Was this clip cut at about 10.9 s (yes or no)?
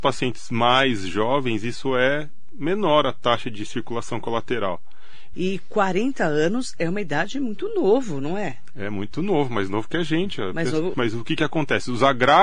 yes